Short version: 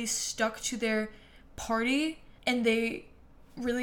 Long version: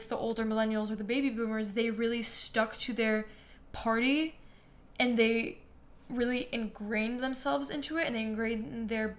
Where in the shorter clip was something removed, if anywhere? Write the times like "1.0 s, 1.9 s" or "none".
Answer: 2.4 s